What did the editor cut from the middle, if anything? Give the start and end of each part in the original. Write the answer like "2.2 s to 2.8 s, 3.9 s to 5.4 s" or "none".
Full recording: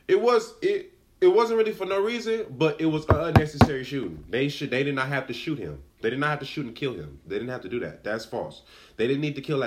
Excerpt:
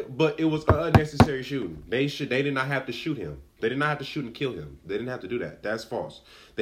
none